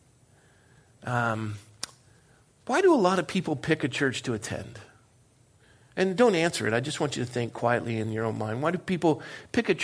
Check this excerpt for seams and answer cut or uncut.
uncut